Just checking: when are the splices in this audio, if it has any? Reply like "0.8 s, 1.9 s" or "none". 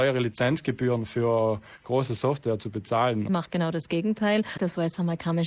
3.3 s, 4.6 s